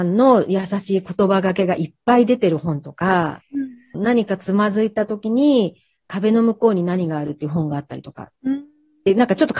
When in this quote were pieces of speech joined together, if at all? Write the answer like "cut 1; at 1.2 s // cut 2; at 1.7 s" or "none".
cut 1; at 3.9 s // cut 2; at 8.4 s